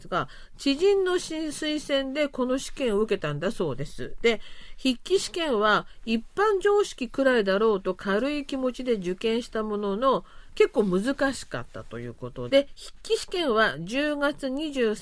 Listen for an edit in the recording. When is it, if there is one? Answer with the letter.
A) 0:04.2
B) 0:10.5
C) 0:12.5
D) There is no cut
C